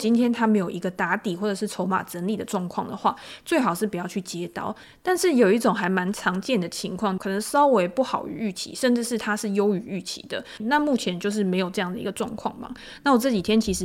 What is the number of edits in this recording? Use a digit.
2